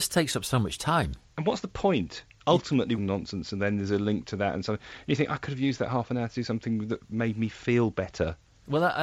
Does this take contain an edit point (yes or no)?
yes